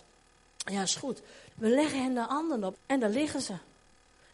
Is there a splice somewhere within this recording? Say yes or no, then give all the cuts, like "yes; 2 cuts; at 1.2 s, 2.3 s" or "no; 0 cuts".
yes; 2 cuts; at 1.5 s, 2.7 s